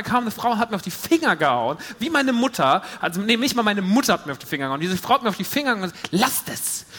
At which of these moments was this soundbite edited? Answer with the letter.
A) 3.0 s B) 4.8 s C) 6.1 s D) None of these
D